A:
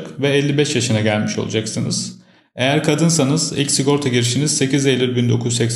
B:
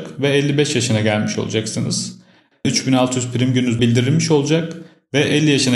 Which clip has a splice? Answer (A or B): B